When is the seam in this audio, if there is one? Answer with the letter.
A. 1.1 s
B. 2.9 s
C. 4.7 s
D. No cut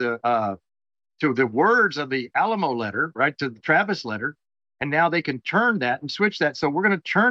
D